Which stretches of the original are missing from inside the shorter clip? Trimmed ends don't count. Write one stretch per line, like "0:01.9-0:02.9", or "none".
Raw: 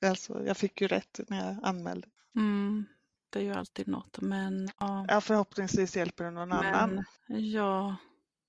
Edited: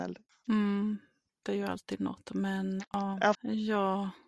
0:05.2-0:07.2